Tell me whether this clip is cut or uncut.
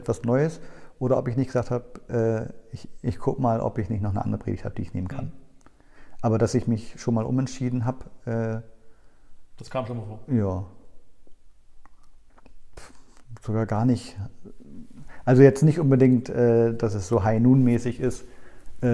uncut